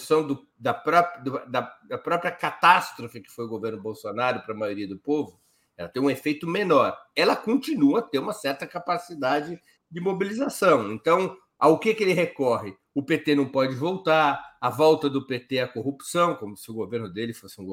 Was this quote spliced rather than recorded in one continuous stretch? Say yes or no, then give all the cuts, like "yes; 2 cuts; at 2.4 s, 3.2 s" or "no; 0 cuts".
no; 0 cuts